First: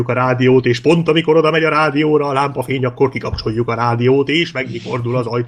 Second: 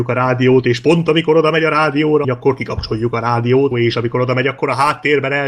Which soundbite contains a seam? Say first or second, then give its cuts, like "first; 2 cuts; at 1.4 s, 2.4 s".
second; 2 cuts; at 2.2 s, 3.7 s